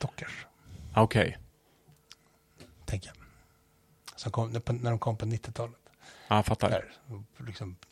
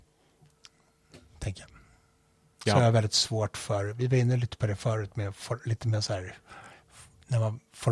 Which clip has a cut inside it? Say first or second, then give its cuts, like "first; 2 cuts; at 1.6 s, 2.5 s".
second; 1 cut; at 2.7 s